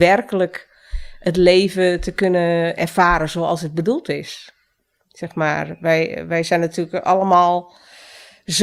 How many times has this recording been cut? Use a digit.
0